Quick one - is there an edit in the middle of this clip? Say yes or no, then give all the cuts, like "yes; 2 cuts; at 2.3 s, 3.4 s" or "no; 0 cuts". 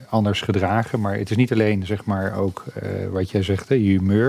no; 0 cuts